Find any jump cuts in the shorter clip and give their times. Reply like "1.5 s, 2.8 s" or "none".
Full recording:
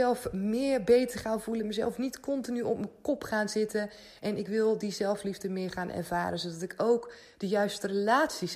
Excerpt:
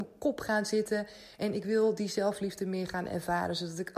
none